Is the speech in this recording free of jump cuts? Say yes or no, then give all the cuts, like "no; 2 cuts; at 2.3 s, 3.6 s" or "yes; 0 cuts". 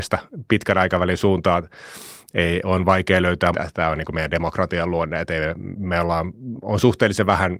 no; 1 cut; at 3.5 s